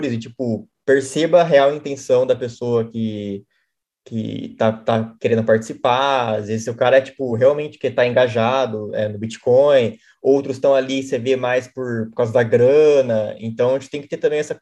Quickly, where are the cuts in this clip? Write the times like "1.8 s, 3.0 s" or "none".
none